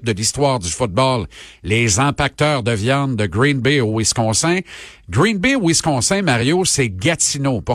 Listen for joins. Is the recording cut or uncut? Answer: uncut